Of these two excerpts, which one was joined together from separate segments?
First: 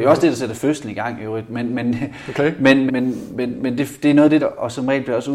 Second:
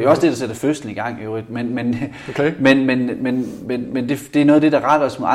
first; 2 cuts; at 2.9 s, 4.4 s

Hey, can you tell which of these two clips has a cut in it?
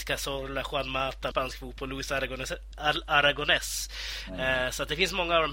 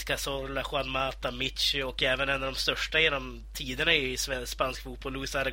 first; 1 cut; at 1.3 s

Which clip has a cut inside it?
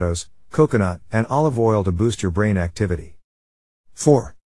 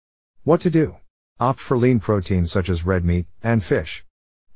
second; 2 cuts; at 1.4 s, 3.4 s

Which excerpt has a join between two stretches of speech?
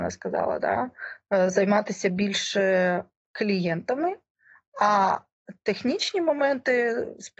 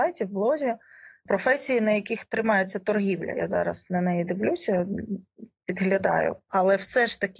second; 1 cut; at 6.5 s

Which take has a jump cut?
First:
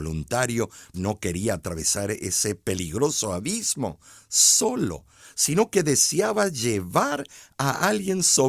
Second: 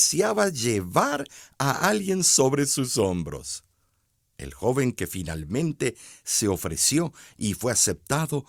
first; 1 cut; at 0.9 s

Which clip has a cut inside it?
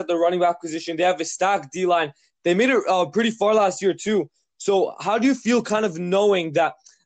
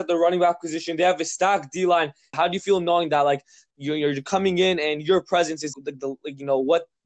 second; 2 cuts; at 2.3 s, 5.7 s

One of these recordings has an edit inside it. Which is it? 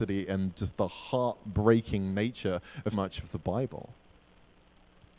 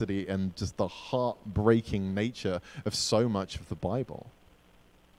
first; 1 cut; at 2.9 s

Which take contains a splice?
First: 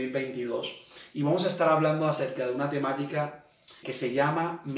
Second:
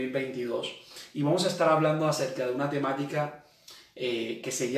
first; 1 cut; at 3.8 s

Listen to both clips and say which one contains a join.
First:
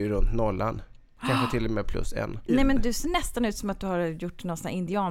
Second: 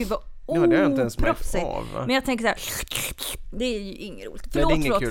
first; 1 cut; at 2.5 s

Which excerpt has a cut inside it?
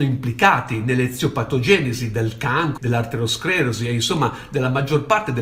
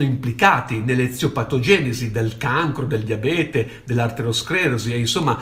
first; 1 cut; at 2.8 s

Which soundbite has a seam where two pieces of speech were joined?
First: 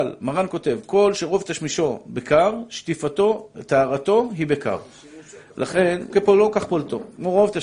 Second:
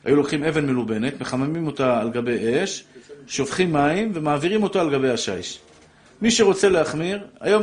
first; 1 cut; at 6.1 s

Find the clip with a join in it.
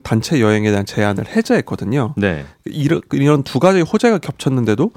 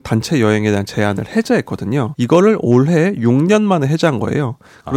second; 1 cut; at 2.1 s

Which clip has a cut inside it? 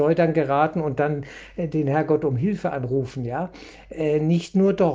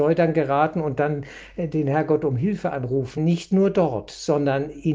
second; 1 cut; at 3.2 s

